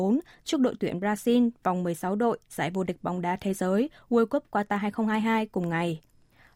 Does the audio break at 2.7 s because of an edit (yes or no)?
no